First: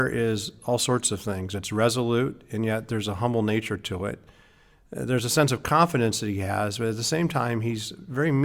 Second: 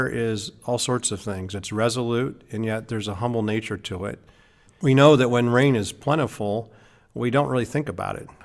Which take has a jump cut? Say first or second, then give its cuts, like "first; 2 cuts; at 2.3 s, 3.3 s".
second; 1 cut; at 4.7 s